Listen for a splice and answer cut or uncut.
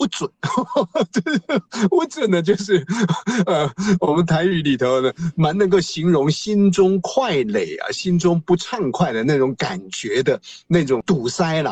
uncut